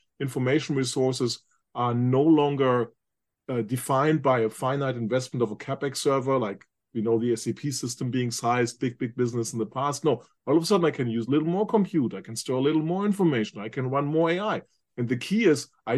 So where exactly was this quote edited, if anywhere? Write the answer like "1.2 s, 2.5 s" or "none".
none